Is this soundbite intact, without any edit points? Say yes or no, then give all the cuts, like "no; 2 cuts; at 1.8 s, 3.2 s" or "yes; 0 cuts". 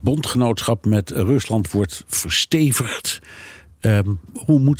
yes; 0 cuts